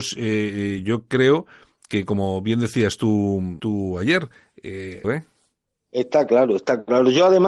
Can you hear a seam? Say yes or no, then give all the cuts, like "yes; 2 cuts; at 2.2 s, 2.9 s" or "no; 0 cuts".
yes; 2 cuts; at 3.6 s, 5.0 s